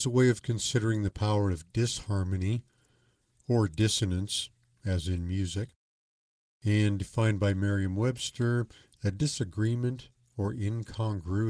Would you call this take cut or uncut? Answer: uncut